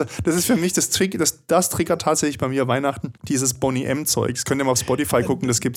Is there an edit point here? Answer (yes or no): yes